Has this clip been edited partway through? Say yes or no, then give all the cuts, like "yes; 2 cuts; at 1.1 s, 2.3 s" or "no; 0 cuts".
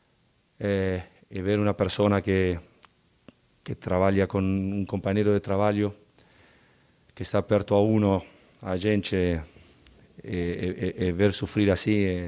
yes; 1 cut; at 7.1 s